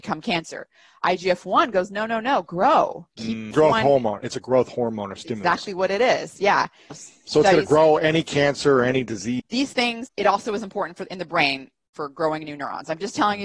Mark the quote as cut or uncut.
cut